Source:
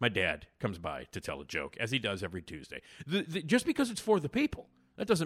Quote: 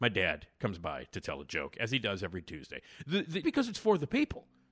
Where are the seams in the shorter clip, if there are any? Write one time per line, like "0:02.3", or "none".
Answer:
0:03.4